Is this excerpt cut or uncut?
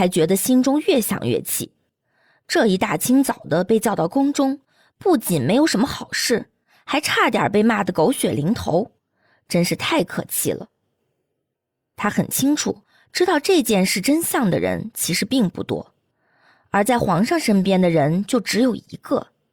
uncut